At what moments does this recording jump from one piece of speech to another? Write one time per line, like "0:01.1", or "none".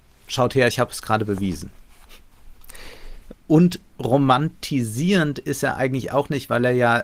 0:03.3